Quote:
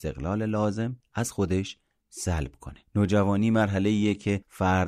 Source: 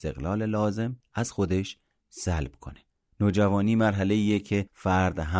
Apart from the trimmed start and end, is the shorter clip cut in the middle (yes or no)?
yes